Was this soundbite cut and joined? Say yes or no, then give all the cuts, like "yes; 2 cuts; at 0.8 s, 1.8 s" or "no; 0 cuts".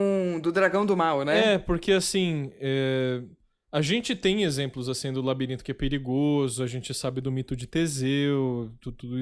no; 0 cuts